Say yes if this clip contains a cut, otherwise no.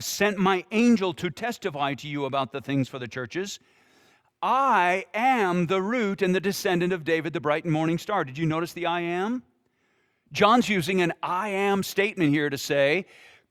no